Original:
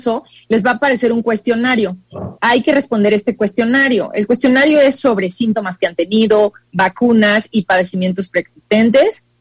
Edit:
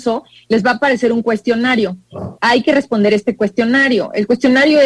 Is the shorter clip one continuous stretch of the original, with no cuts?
yes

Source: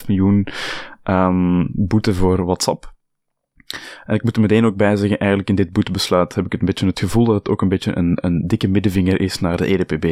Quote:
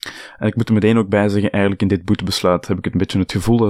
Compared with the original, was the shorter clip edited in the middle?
no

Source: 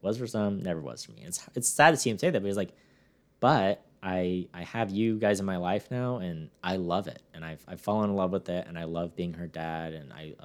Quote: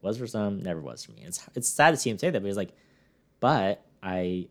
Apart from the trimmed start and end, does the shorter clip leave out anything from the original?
no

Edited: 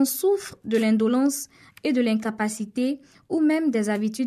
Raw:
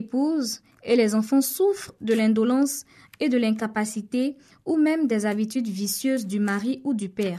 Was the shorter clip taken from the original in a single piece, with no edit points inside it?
yes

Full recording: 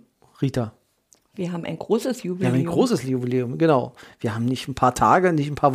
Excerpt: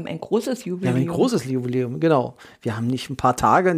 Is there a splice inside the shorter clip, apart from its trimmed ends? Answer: no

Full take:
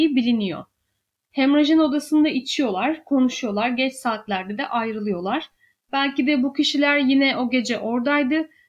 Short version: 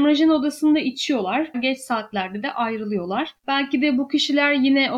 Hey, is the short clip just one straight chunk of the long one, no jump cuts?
no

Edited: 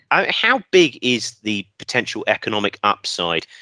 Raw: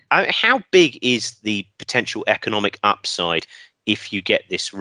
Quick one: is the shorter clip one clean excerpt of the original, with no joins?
yes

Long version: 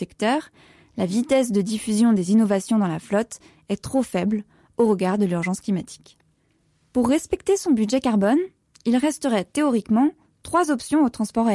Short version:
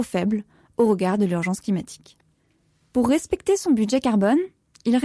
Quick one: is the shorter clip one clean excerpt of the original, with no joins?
yes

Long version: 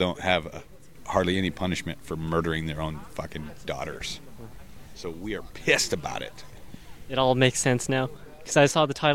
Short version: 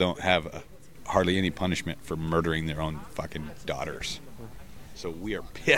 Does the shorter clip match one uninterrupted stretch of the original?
yes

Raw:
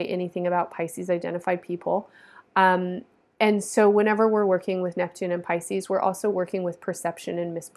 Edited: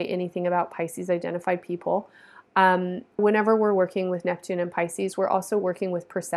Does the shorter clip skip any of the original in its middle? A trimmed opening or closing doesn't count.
yes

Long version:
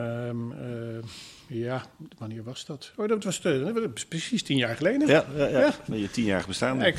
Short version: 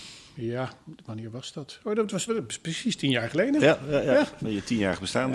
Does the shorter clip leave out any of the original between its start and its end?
yes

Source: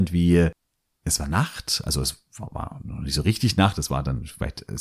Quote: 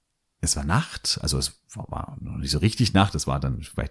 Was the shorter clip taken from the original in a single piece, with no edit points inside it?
yes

